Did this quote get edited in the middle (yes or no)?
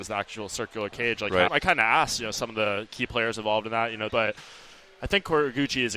yes